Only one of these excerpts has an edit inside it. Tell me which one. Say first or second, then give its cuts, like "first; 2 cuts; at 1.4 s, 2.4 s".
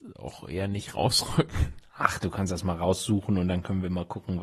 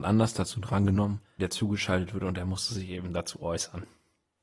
second; 1 cut; at 1.4 s